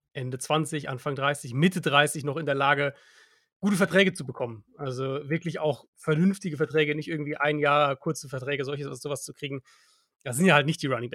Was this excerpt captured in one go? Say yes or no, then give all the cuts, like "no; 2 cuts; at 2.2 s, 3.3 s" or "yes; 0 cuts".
yes; 0 cuts